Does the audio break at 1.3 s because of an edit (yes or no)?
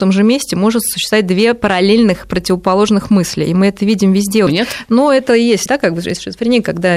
no